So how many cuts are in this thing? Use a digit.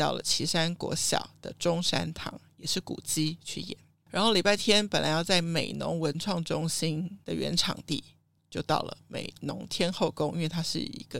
1